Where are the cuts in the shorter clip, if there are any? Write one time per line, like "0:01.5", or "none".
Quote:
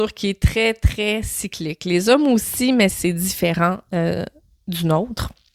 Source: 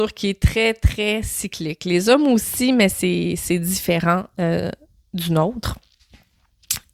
0:02.9